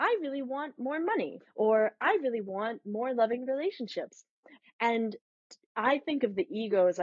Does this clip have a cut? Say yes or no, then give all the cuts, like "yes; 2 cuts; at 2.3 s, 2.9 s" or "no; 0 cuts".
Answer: yes; 2 cuts; at 1.4 s, 4.6 s